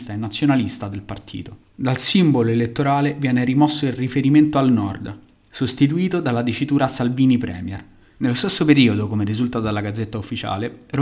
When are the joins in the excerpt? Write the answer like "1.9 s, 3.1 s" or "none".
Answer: none